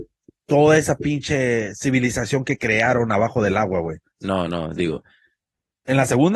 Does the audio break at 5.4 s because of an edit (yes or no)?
no